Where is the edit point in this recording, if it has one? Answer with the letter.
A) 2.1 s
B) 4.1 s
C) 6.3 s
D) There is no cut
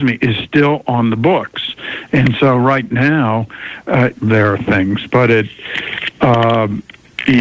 B